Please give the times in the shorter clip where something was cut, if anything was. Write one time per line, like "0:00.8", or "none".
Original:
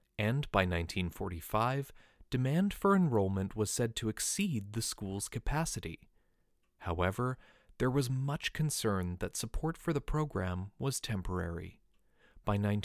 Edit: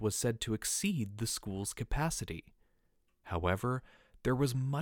none